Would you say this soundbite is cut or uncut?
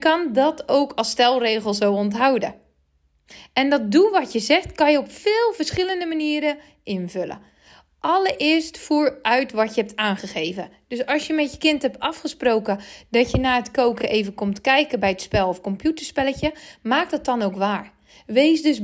uncut